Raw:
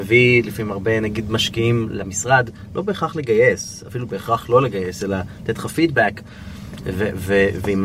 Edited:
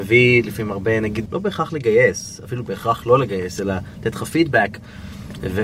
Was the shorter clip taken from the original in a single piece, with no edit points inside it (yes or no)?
no